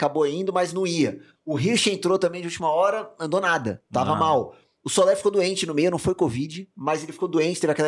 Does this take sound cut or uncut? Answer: uncut